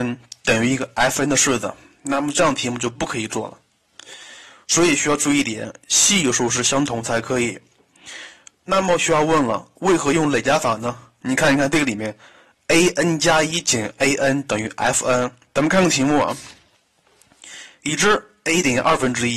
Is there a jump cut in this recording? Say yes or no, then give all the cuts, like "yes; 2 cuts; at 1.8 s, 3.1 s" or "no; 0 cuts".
yes; 1 cut; at 15.5 s